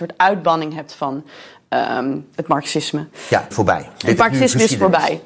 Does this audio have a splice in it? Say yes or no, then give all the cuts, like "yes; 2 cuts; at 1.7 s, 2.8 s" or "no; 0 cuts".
yes; 1 cut; at 3.5 s